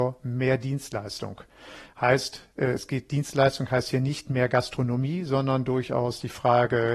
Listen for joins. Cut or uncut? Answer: uncut